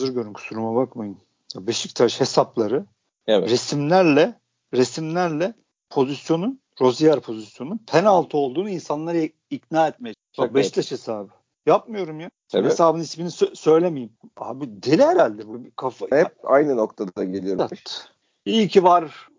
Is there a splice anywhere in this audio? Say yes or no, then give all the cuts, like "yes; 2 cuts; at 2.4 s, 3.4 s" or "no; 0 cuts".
yes; 2 cuts; at 16.1 s, 17.6 s